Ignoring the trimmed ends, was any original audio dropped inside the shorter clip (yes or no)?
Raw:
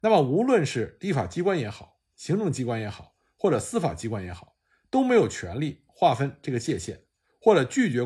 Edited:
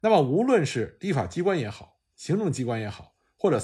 no